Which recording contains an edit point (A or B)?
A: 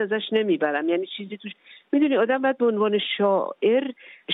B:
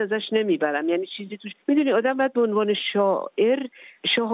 B